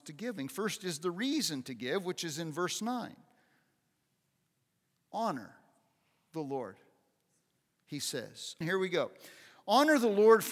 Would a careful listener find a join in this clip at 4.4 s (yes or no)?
no